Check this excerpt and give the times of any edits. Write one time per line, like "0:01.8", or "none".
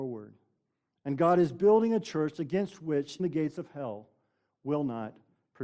0:03.2